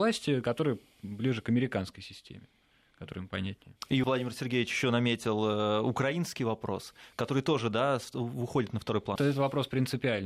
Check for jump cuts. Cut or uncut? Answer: cut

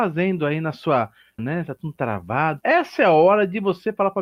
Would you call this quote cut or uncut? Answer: cut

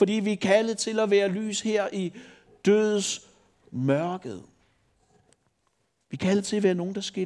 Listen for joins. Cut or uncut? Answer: uncut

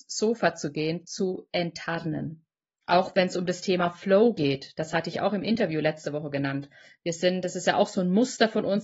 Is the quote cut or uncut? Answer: uncut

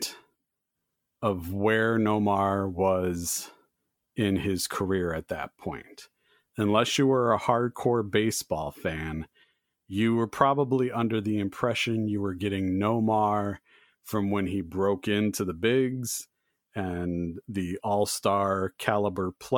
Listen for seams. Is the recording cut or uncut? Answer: uncut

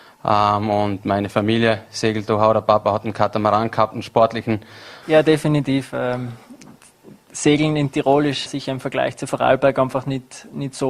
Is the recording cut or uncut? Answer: cut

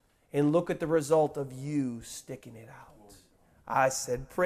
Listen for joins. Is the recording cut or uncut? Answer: uncut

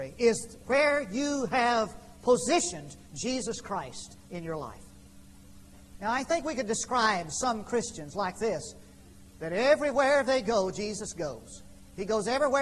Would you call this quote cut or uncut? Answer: uncut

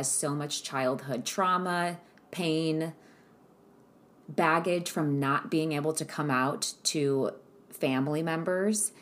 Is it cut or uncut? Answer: uncut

